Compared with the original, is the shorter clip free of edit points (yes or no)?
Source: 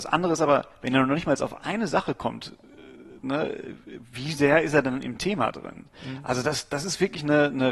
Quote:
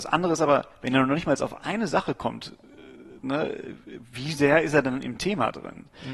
yes